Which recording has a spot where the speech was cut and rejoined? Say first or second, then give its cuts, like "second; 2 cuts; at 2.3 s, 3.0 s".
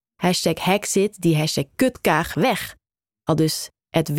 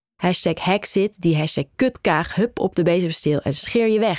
first; 1 cut; at 2.3 s